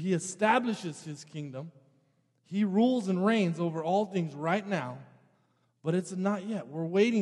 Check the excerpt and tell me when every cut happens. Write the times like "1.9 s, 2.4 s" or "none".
none

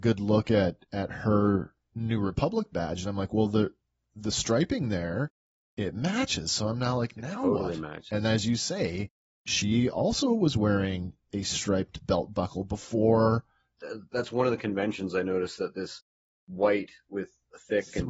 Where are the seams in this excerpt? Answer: 13.8 s

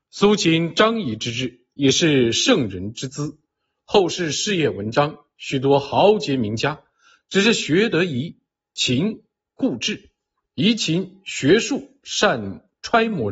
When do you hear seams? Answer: none

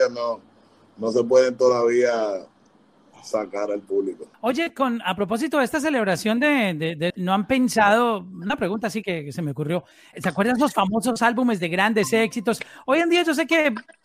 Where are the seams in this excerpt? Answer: 4.3 s, 7.1 s, 10.1 s

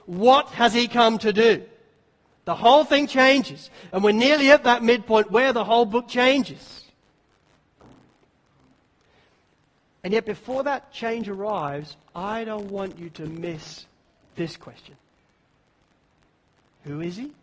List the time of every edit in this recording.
none

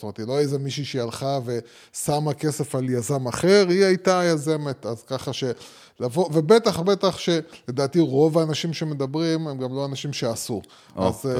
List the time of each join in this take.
6.8 s

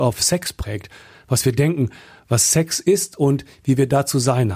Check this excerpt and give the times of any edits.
none

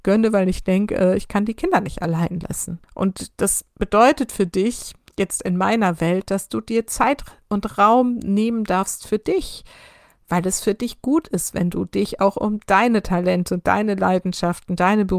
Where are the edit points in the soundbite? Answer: 2.8 s

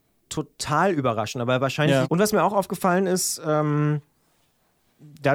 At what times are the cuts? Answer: 2.0 s

